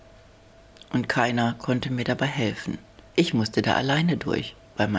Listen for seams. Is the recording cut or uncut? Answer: uncut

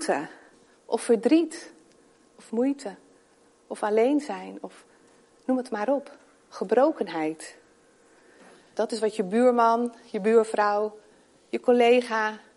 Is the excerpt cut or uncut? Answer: cut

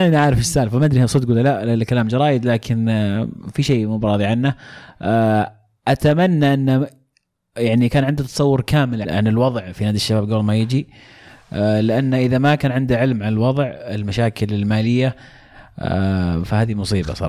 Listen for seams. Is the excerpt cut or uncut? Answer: cut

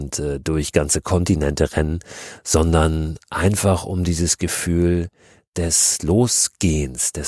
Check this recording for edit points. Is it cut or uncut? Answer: uncut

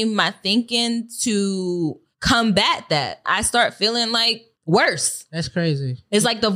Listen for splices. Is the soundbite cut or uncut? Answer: cut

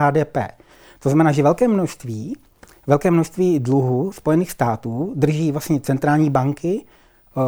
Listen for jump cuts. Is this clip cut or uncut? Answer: uncut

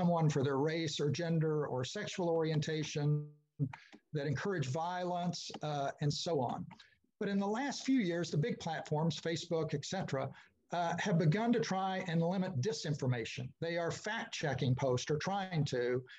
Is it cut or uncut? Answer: uncut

